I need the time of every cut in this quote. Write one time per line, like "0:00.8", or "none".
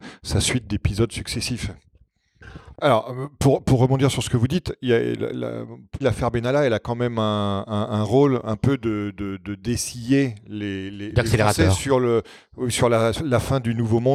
0:02.7
0:06.0
0:13.2